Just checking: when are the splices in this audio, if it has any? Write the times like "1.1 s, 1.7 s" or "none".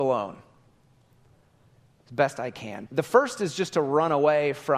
2.9 s